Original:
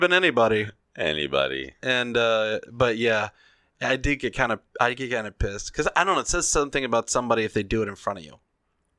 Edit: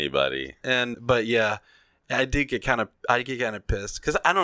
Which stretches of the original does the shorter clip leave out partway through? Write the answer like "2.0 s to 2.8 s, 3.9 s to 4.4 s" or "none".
2.1 s to 2.7 s